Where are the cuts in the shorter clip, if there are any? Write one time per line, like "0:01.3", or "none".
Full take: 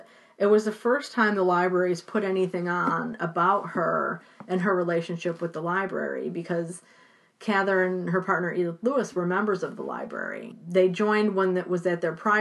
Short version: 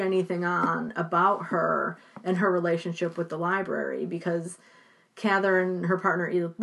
none